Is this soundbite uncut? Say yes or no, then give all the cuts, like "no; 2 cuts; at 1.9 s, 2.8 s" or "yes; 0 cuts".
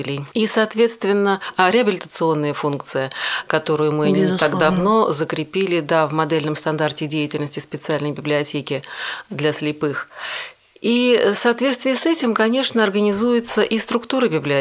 yes; 0 cuts